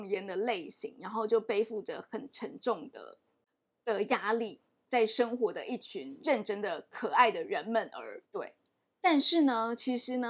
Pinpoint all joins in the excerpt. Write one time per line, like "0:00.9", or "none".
0:08.2